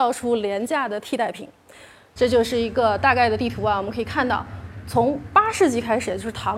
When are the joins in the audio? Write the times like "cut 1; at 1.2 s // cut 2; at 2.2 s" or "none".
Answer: cut 1; at 2.2 s